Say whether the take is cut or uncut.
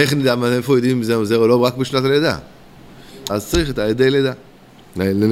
cut